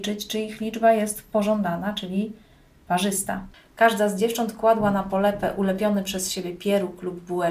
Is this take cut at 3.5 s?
yes; 1 cut; at 3.5 s

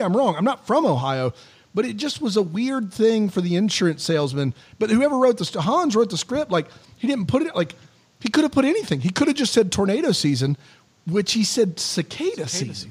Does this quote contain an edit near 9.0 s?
no; 0 cuts

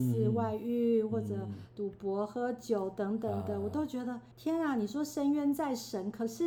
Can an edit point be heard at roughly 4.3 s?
yes; 1 cut; at 4.3 s

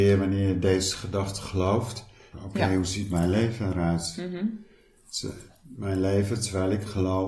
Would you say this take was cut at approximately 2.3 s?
yes; 1 cut; at 2.3 s

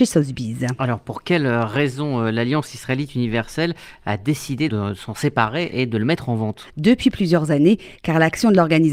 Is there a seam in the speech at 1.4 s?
no; 3 cuts; at 4.7 s, 6.7 s, 8.0 s

